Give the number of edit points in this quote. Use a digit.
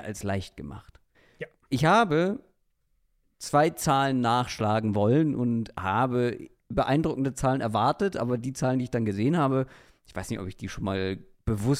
1